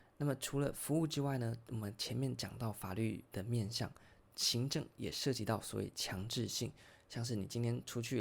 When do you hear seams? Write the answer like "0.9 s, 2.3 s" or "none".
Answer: none